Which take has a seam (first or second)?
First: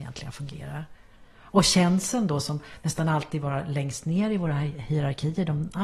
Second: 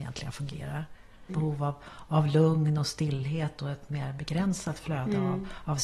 second